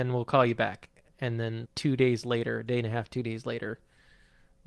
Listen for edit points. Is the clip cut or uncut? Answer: cut